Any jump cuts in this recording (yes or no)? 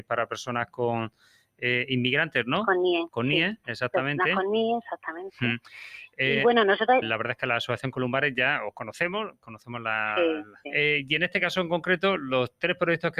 yes